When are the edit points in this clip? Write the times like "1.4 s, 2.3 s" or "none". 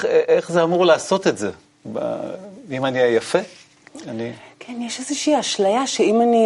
none